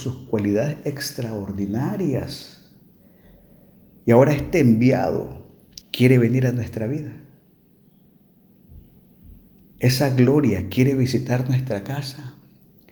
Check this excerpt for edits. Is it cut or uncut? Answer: cut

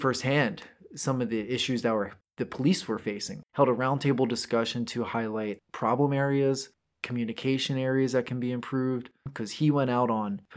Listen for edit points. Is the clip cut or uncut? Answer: cut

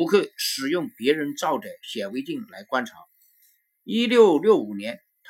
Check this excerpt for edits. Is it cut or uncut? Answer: uncut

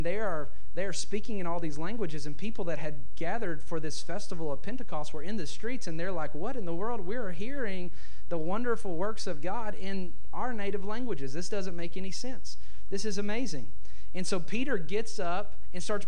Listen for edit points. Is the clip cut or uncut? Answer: uncut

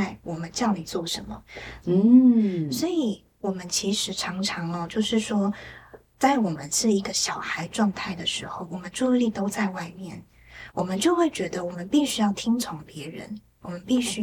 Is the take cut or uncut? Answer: cut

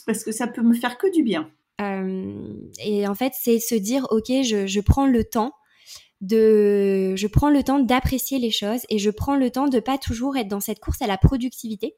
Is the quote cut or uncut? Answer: cut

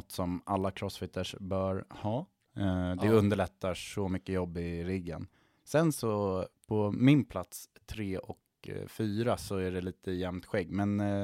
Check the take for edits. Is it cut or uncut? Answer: uncut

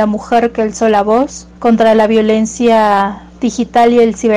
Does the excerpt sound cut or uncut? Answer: cut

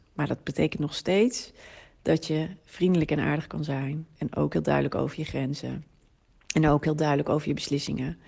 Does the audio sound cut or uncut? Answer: cut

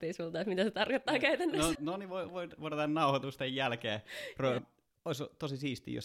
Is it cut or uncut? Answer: cut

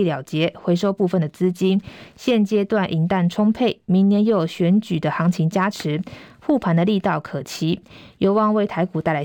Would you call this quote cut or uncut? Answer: uncut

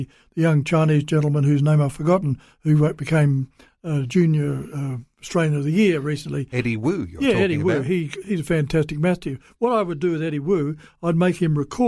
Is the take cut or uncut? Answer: uncut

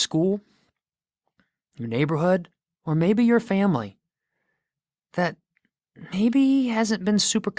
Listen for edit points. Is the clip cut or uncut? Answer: uncut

